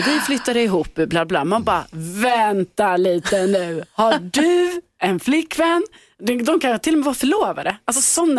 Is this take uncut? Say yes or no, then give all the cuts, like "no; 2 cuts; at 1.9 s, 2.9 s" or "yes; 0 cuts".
yes; 0 cuts